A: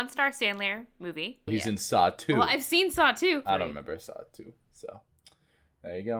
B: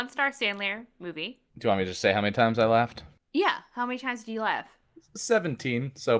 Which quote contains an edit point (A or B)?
A